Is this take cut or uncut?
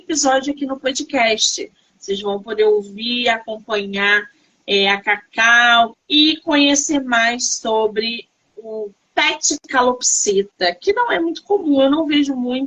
cut